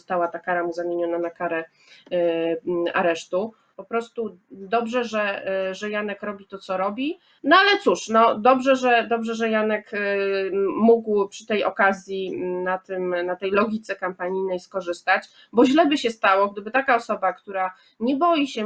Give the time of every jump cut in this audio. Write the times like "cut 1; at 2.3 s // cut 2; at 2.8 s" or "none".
cut 1; at 3.7 s // cut 2; at 7.4 s